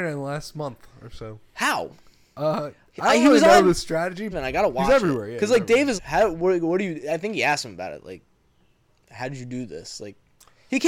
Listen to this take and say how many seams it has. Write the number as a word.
two